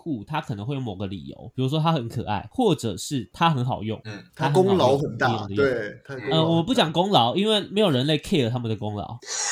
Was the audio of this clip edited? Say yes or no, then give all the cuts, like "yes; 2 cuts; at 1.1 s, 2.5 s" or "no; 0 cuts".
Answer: no; 0 cuts